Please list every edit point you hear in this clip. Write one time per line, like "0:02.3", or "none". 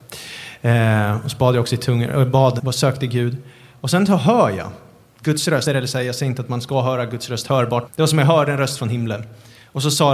0:02.6
0:05.7
0:07.9